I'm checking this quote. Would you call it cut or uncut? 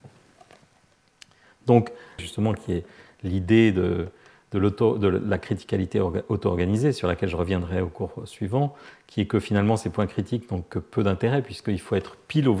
cut